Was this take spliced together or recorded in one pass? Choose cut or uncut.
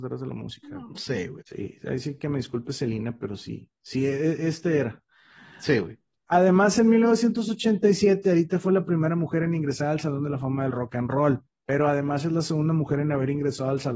cut